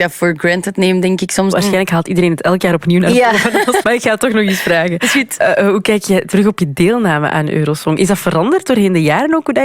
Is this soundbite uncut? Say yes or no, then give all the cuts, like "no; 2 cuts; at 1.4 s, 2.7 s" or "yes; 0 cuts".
no; 2 cuts; at 1.5 s, 3.8 s